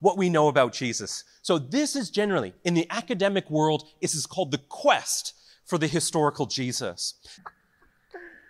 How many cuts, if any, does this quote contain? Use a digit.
1